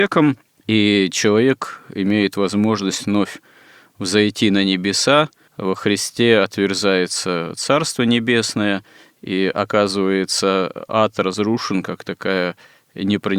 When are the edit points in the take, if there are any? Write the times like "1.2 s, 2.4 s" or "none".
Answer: none

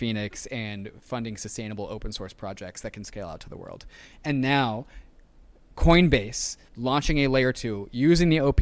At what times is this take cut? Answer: 4.1 s, 6.7 s

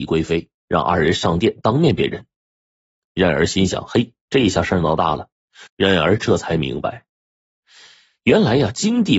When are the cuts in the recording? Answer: 5.7 s

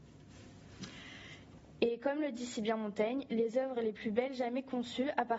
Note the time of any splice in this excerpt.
1.8 s

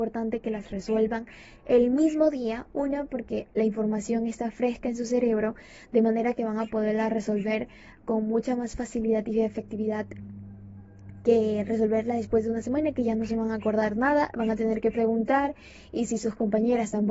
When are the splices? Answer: none

